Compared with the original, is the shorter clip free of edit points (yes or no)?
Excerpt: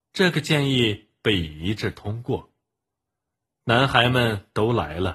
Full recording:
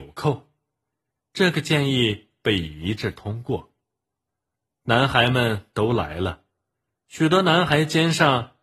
yes